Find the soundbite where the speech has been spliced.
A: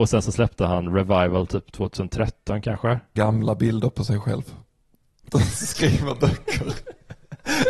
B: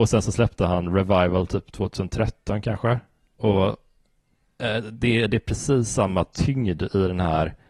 A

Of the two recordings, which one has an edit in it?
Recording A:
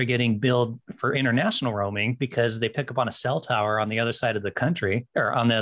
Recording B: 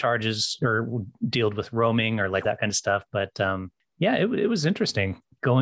B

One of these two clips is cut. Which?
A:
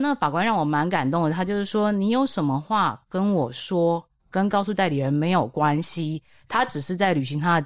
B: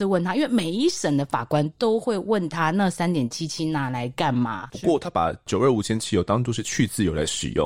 B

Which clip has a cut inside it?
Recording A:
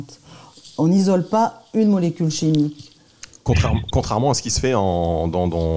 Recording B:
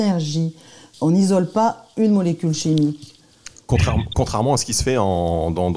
B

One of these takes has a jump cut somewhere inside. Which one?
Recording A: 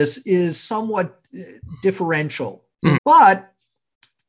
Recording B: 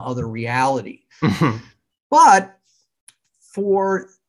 A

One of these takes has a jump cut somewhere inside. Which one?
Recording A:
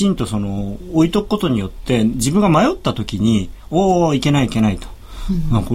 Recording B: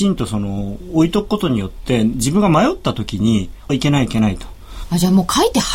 B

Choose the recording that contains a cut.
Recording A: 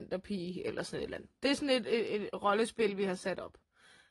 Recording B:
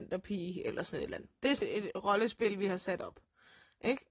B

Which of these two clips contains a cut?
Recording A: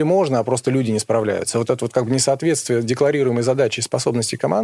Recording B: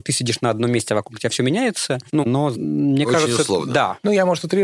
B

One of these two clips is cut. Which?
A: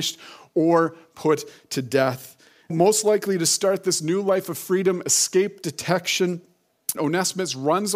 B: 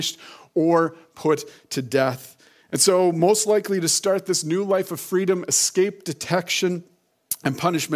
A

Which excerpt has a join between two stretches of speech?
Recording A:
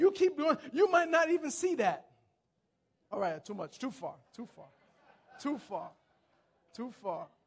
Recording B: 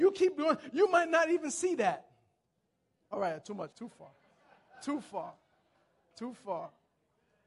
B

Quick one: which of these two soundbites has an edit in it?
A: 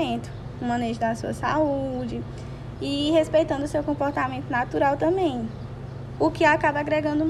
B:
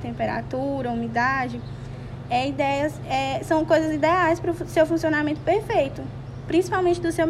A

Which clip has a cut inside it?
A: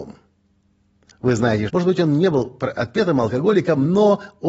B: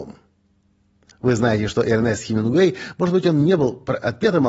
A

